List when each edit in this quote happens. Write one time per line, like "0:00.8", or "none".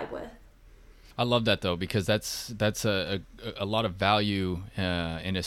none